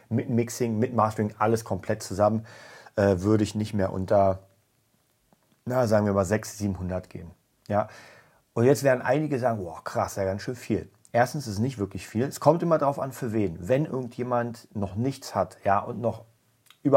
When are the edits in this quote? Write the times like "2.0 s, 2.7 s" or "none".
none